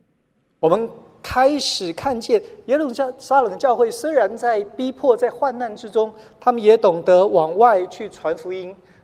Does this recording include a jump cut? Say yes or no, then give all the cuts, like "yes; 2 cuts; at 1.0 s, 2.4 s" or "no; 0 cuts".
no; 0 cuts